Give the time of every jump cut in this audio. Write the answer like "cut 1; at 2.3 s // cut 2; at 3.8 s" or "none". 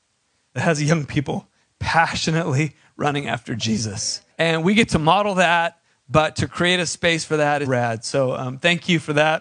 cut 1; at 4.3 s // cut 2; at 7.7 s